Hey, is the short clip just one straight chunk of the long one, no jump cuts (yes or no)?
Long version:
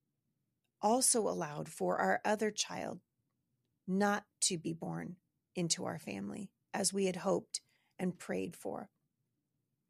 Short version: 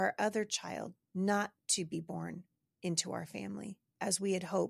no